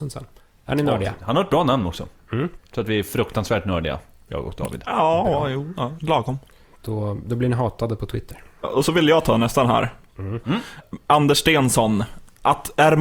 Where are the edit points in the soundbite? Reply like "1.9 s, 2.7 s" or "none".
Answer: 6.0 s, 10.4 s